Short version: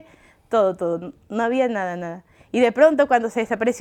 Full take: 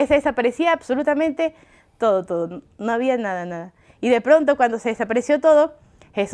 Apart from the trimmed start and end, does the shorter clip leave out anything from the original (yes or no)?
no